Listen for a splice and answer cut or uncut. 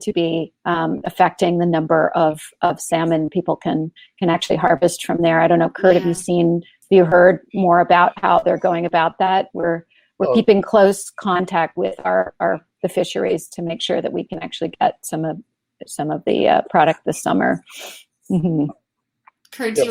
uncut